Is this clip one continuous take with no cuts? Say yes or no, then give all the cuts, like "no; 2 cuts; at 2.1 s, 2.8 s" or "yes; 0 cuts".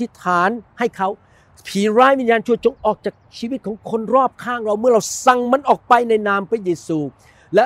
yes; 0 cuts